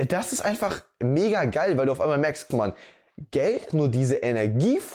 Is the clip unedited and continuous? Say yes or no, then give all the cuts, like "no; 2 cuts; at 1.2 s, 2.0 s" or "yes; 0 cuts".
no; 2 cuts; at 2.5 s, 3.7 s